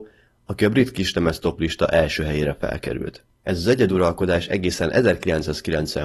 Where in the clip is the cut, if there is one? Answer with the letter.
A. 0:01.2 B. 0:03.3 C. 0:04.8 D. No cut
B